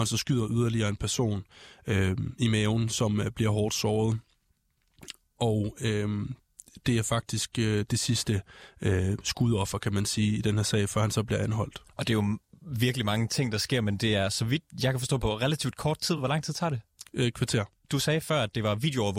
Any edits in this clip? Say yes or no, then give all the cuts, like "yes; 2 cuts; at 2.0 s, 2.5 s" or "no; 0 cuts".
no; 0 cuts